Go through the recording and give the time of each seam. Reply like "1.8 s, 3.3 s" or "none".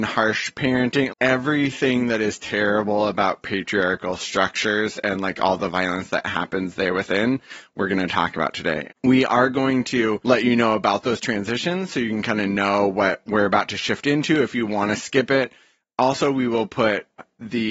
1.1 s